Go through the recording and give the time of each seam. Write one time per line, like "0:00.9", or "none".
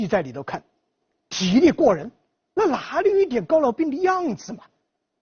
0:01.2